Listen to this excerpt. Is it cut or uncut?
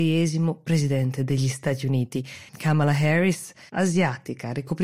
cut